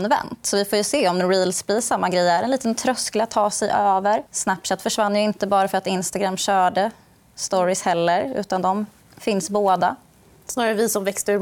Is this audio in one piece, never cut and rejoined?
no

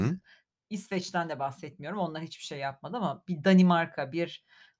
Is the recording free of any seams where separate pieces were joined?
yes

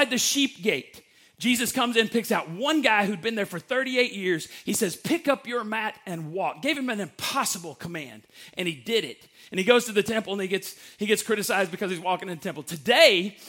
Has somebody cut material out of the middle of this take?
no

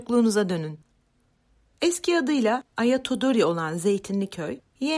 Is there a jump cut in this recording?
yes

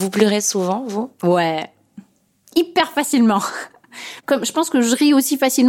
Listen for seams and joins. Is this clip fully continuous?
yes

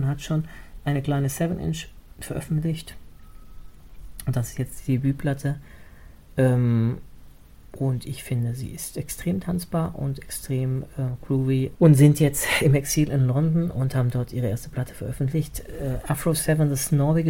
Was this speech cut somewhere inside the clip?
yes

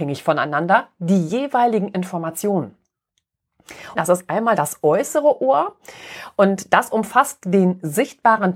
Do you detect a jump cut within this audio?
yes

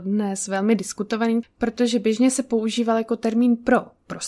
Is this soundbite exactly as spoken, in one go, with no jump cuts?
no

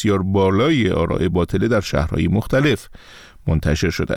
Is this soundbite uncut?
yes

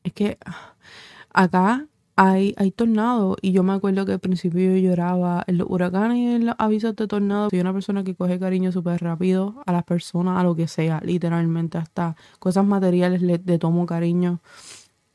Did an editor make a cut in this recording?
yes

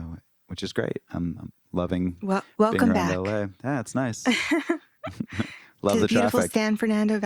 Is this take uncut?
yes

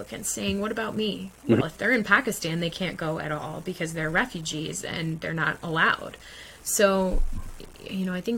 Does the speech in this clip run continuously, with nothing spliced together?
no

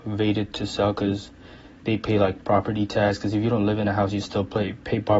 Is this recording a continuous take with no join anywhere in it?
yes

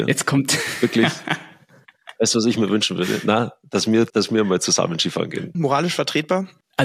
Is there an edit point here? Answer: yes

